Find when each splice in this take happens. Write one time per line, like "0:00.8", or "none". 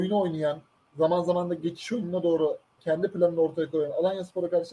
0:02.8